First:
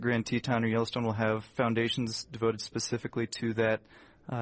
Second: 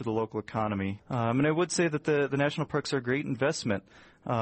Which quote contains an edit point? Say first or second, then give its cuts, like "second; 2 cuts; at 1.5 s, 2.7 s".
second; 1 cut; at 1.0 s